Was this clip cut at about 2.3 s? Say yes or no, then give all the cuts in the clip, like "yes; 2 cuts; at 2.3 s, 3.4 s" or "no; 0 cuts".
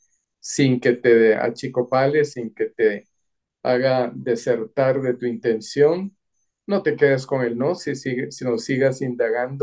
yes; 1 cut; at 2.3 s